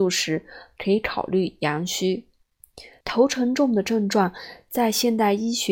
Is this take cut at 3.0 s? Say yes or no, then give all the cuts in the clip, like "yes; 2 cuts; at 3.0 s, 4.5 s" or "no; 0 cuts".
yes; 1 cut; at 3.0 s